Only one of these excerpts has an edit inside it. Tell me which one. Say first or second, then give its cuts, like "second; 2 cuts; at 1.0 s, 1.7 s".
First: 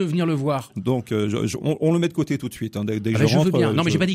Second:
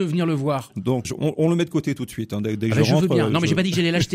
second; 1 cut; at 1.0 s